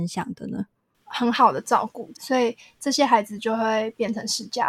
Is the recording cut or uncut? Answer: cut